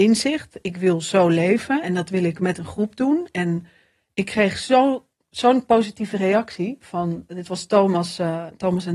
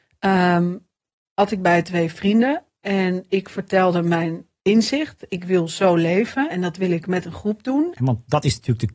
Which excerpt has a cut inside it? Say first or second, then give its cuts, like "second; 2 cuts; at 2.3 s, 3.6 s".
second; 1 cut; at 8.0 s